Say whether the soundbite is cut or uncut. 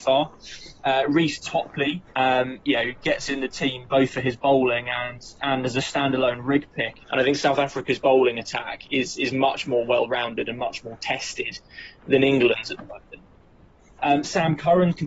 cut